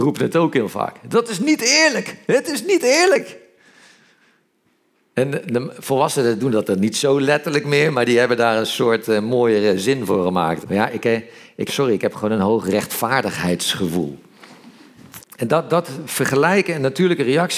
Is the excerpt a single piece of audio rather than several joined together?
no; 3 cuts; at 10.6 s, 11.7 s, 15.2 s

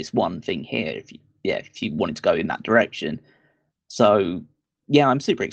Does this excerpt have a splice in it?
no; 0 cuts

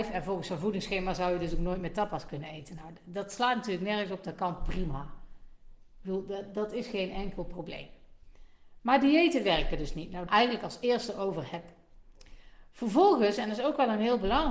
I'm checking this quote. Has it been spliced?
yes; 1 cut; at 10.3 s

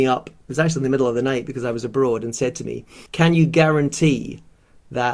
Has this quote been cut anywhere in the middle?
yes; 1 cut; at 3.1 s

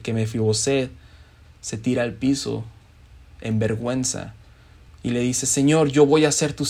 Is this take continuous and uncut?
no; 1 cut; at 4.9 s

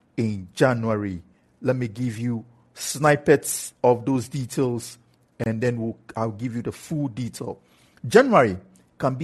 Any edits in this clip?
no; 0 cuts

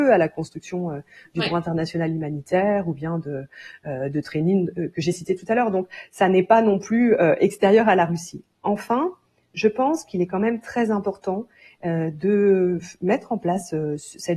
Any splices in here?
no; 0 cuts

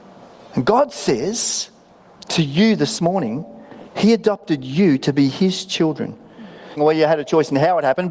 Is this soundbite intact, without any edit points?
no; 2 cuts; at 3.9 s, 6.8 s

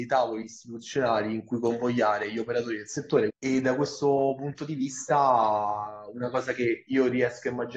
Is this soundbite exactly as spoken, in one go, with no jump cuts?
no; 1 cut; at 3.3 s

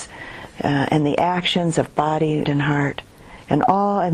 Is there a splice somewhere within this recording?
yes; 1 cut; at 2.4 s

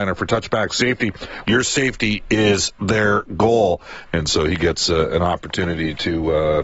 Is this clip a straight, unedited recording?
no; 2 cuts; at 1.4 s, 4.1 s

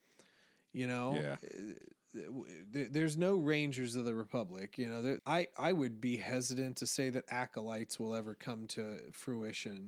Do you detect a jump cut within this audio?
yes; 1 cut; at 5.2 s

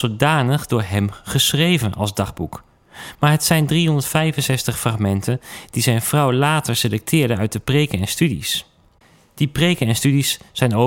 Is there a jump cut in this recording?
no; 0 cuts

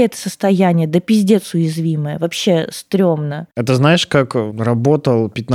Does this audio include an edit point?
no; 0 cuts

